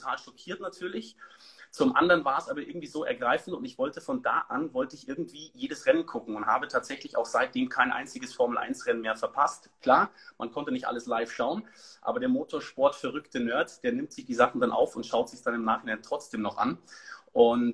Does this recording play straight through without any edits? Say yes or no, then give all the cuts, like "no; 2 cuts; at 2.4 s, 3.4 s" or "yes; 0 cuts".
yes; 0 cuts